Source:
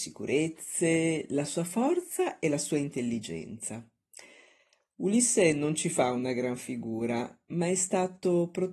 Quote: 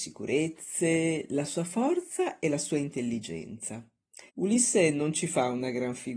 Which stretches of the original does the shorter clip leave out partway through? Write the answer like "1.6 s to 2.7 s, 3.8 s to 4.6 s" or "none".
4.3 s to 4.9 s